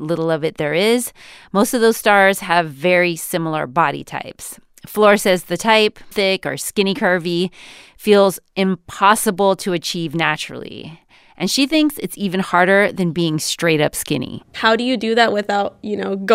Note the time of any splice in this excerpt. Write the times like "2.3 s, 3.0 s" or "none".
6.1 s